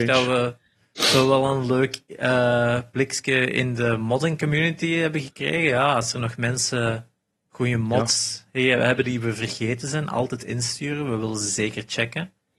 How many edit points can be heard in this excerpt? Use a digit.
0